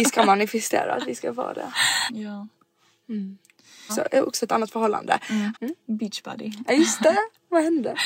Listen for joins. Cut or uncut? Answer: cut